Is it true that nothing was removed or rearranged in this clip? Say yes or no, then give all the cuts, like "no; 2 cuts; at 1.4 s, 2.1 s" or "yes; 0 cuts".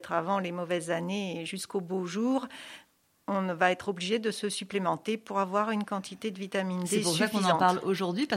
yes; 0 cuts